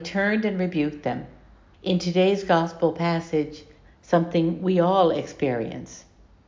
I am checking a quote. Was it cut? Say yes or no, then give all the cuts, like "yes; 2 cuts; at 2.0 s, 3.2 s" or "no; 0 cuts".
yes; 2 cuts; at 1.7 s, 3.8 s